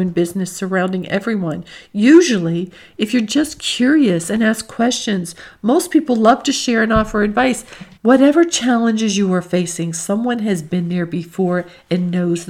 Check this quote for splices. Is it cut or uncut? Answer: cut